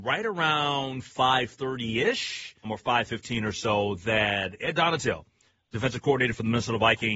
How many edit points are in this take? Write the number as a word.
one